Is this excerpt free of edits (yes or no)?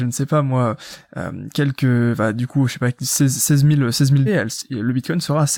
no